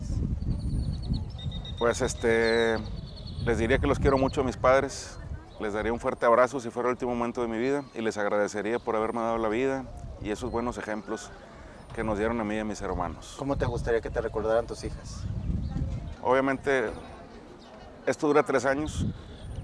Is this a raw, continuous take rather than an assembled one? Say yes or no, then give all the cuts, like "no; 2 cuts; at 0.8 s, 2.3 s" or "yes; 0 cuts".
no; 1 cut; at 16.1 s